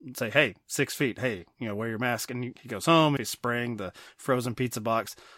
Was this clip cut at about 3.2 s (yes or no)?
yes